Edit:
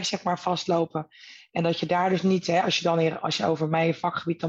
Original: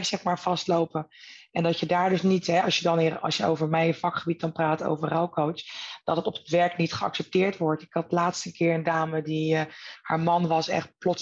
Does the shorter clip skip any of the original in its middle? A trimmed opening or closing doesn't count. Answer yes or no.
no